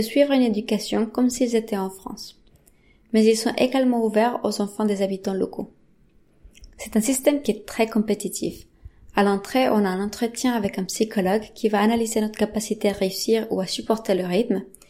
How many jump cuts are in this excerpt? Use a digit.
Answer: 0